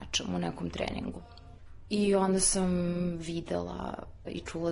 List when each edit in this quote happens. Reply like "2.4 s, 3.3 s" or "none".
none